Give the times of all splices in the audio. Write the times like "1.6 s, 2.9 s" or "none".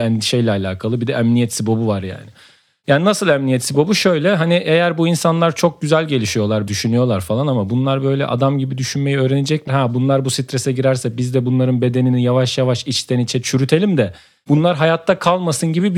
6.7 s, 9.7 s